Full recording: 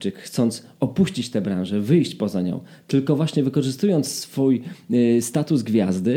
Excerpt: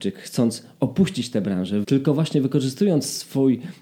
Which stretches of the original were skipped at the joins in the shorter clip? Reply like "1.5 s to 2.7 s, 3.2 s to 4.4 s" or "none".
1.8 s to 2.8 s